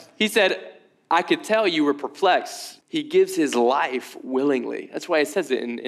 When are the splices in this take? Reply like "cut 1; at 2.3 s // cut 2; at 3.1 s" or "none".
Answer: cut 1; at 2.8 s